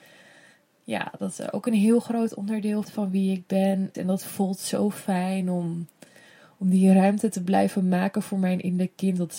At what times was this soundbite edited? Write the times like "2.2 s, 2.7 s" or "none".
2.8 s, 3.9 s